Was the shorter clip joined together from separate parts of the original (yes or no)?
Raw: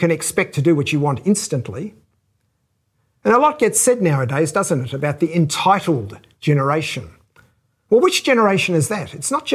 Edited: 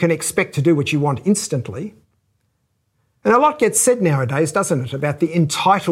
no